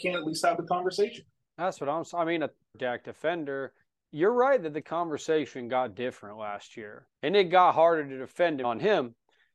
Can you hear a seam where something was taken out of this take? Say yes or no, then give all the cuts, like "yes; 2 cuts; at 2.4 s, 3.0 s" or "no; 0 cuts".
yes; 3 cuts; at 2.7 s, 7.1 s, 8.6 s